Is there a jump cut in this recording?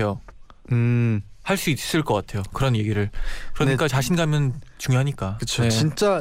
no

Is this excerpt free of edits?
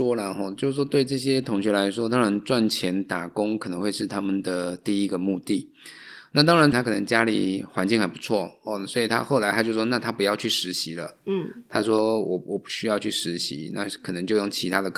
no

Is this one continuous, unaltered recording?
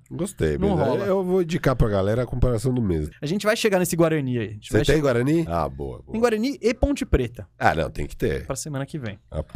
no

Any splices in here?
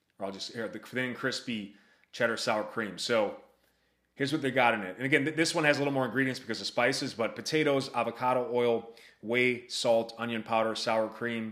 no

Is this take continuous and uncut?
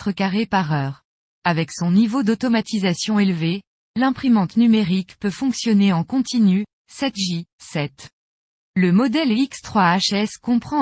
yes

